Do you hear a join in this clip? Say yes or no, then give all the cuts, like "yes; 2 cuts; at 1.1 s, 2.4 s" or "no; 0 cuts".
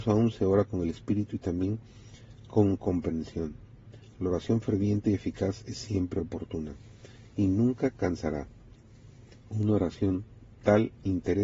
no; 0 cuts